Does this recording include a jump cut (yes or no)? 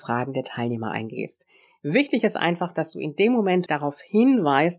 yes